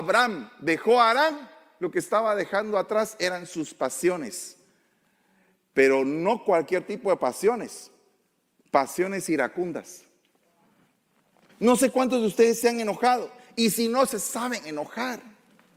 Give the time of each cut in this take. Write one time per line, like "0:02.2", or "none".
0:11.5